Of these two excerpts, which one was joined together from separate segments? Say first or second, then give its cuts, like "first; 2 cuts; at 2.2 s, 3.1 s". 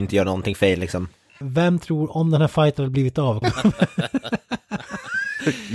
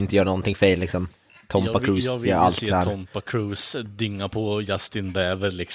first; 2 cuts; at 1.4 s, 3.4 s